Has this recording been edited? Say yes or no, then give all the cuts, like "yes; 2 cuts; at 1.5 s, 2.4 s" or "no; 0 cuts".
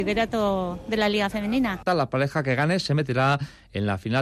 yes; 1 cut; at 1.9 s